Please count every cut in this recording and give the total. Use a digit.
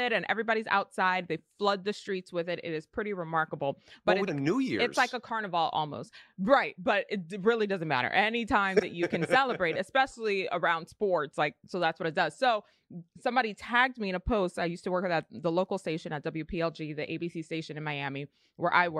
1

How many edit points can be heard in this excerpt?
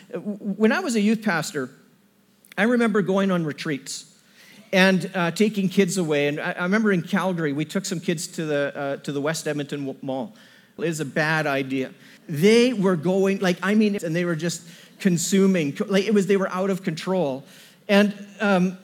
3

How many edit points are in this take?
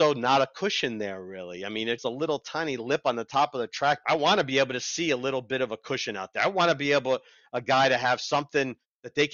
2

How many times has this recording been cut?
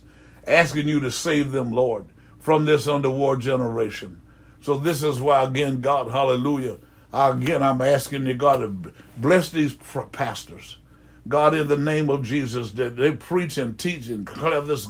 0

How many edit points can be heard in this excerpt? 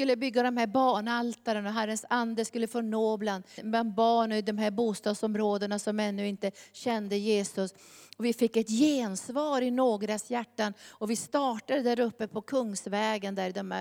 1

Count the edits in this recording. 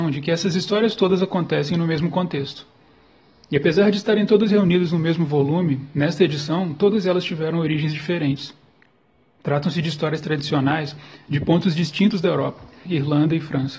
1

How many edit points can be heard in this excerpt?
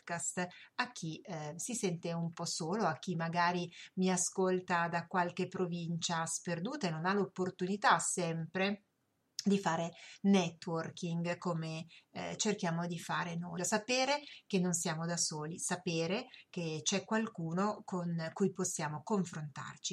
1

